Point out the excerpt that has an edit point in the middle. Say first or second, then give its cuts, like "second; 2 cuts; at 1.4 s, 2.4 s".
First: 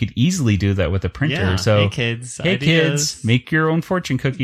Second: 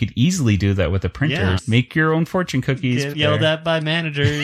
second; 2 cuts; at 1.6 s, 3.1 s